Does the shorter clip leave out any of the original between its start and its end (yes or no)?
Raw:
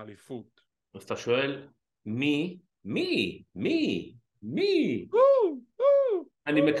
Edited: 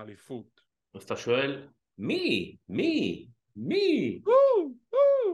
yes